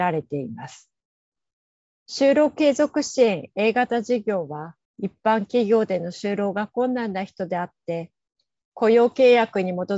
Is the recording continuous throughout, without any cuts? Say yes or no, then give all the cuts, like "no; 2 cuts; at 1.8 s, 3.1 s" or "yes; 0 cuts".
no; 2 cuts; at 1.9 s, 4.9 s